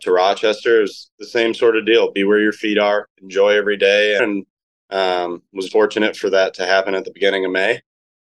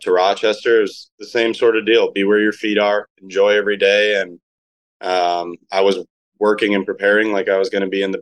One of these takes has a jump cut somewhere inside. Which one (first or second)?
first